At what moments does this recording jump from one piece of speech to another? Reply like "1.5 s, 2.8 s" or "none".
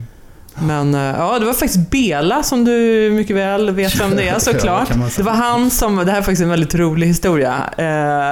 5.2 s